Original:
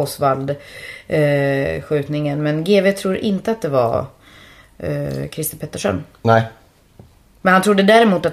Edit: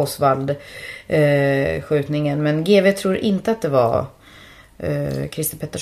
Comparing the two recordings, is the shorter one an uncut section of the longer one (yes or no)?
yes